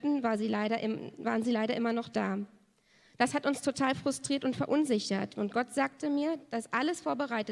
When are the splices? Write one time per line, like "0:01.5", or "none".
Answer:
0:05.3